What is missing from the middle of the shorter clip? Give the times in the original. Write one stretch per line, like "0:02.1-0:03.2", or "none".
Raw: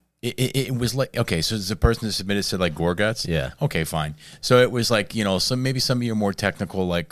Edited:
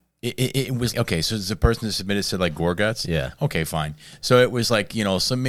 0:00.9-0:01.1

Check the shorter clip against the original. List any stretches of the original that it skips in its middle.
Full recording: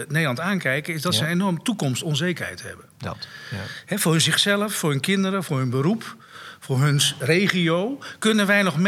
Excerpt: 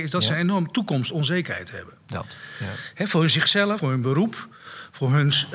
0:04.7-0:05.5

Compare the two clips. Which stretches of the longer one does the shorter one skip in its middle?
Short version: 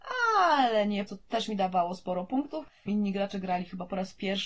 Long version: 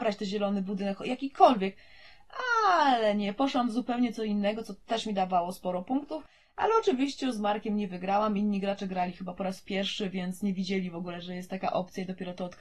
0:03.4-0:04.6
0:06.5-0:08.4

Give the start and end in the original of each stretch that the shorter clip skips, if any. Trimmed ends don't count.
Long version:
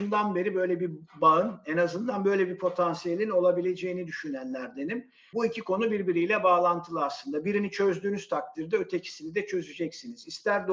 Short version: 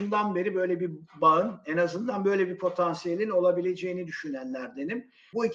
none

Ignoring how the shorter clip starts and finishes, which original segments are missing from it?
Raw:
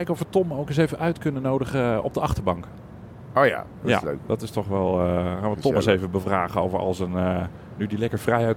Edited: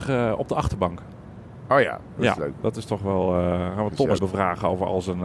0:05.8-0:06.1

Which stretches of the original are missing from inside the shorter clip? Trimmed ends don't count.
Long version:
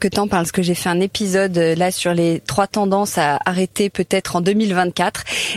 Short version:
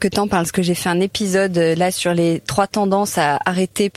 none

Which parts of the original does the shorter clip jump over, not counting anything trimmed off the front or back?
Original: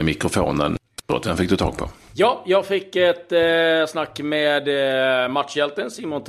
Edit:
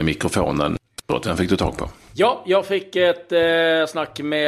none

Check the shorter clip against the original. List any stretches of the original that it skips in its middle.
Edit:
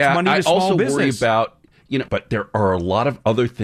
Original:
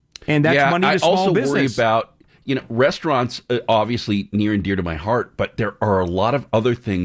0:02.6-0:05.4

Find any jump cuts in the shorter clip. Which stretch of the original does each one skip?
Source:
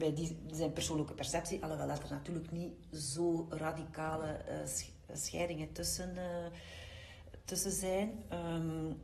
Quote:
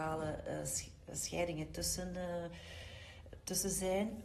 none

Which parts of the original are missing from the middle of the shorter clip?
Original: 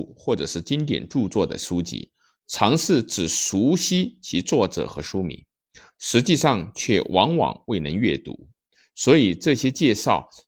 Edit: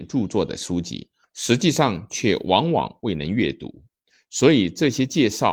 0:02.3-0:05.9

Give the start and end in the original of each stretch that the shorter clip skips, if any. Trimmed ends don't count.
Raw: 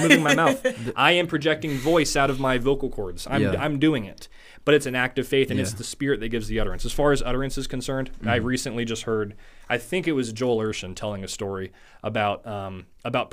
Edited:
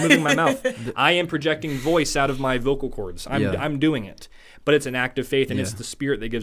none

